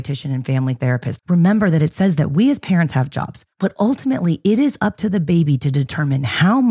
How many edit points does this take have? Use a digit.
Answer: 2